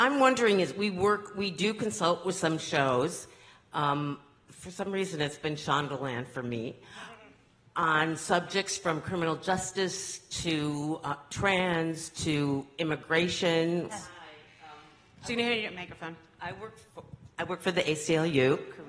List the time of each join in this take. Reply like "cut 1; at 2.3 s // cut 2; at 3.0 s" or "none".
cut 1; at 13.9 s